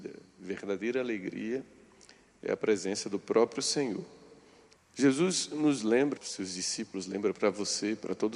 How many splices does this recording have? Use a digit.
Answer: 2